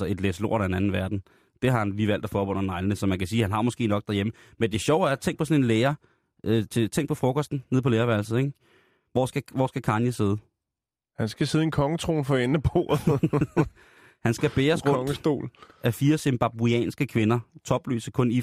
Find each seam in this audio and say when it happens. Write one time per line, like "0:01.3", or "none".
none